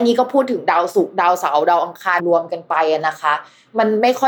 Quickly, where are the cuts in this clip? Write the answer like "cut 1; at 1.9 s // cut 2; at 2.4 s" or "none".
cut 1; at 2.2 s